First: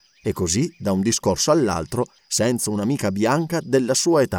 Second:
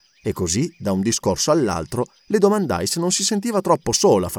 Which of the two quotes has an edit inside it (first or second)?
first